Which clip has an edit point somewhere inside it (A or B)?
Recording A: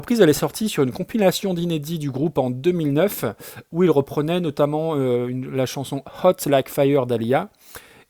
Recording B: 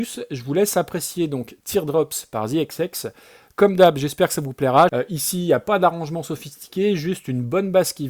B